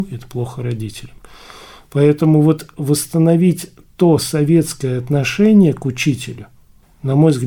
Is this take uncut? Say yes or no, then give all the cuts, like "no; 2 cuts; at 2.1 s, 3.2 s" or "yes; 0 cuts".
yes; 0 cuts